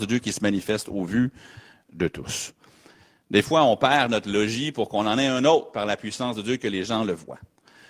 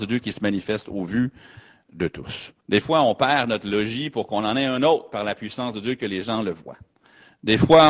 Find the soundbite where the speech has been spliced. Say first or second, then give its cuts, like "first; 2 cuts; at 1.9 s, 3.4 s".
second; 1 cut; at 2.6 s